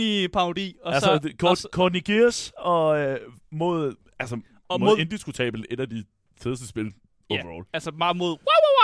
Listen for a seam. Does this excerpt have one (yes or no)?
no